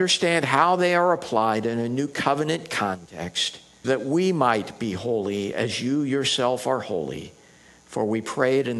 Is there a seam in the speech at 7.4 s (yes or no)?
no